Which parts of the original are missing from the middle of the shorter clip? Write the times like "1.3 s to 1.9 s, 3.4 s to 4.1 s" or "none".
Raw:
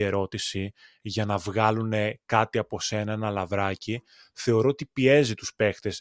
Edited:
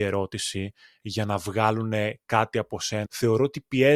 3.1 s to 4.3 s